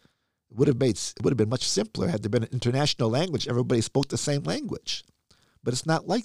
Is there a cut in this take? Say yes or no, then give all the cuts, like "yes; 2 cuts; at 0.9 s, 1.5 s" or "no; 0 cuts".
no; 0 cuts